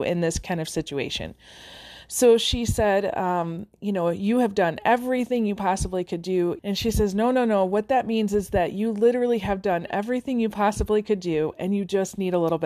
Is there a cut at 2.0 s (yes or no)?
no